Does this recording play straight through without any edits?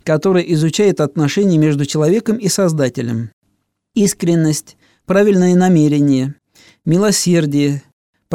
yes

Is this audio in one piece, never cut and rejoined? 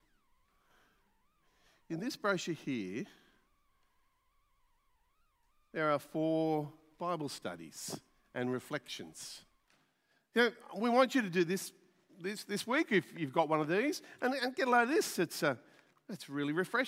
yes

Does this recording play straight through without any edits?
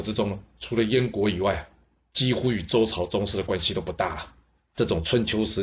no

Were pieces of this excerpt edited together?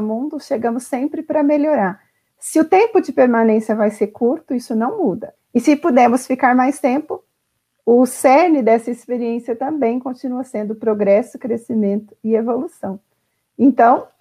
yes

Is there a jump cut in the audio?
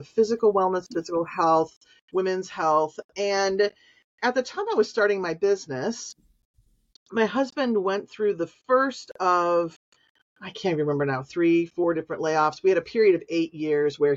no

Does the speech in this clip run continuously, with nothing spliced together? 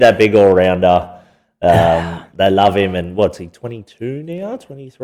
yes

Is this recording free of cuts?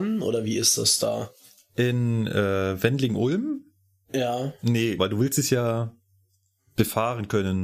no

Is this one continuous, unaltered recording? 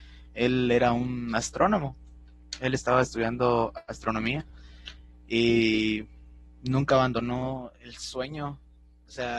yes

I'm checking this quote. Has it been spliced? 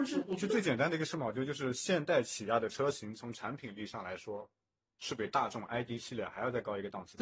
no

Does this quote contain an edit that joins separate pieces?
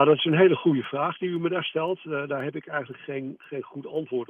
no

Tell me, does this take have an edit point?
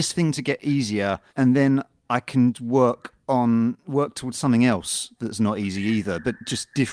yes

